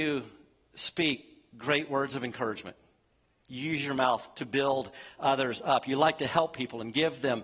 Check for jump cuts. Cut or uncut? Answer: uncut